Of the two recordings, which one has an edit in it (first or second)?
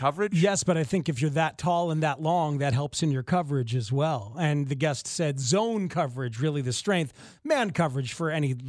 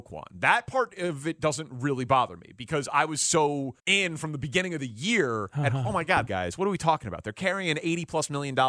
second